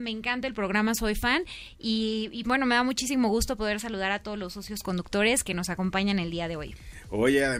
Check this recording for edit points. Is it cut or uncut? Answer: cut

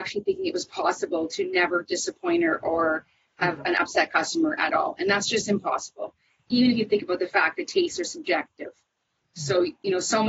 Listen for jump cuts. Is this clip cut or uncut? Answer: uncut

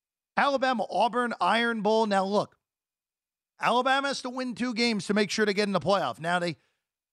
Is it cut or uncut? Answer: uncut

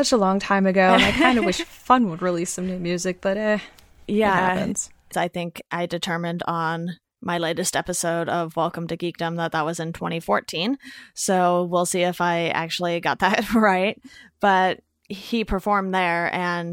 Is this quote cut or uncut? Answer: cut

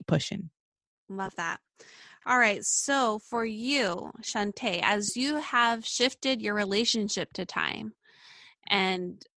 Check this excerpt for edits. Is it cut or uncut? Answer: uncut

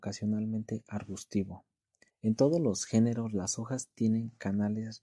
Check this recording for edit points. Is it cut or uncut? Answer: cut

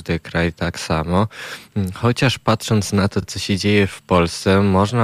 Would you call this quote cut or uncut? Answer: uncut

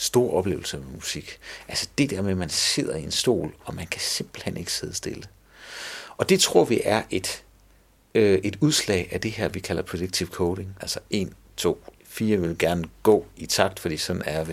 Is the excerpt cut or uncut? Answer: cut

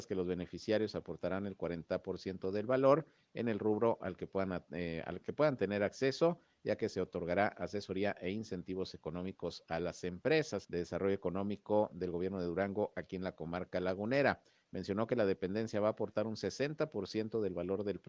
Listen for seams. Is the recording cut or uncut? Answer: cut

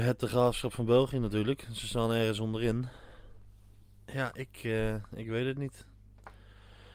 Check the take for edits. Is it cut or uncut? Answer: uncut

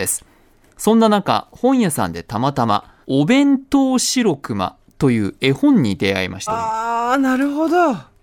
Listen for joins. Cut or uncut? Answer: cut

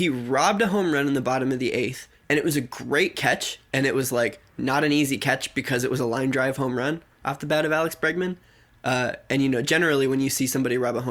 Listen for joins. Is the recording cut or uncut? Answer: uncut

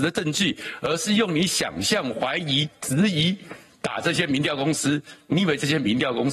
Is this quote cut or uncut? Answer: uncut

